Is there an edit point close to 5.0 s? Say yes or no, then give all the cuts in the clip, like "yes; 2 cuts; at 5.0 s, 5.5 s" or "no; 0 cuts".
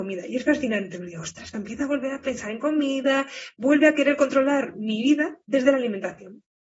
no; 2 cuts; at 1.5 s, 3.5 s